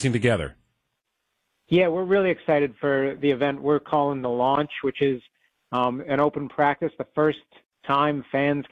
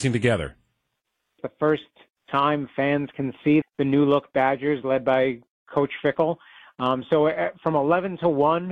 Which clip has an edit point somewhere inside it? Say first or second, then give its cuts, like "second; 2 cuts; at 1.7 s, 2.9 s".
second; 2 cuts; at 1.4 s, 3.6 s